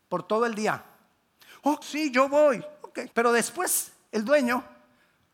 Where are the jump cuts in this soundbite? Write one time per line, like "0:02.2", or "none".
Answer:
0:01.8
0:03.1